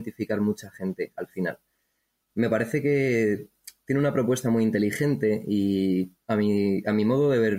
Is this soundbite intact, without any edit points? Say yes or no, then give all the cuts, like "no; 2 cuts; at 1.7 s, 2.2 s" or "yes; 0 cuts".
no; 2 cuts; at 2.3 s, 6.2 s